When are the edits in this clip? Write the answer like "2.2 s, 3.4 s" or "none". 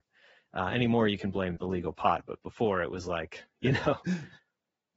1.6 s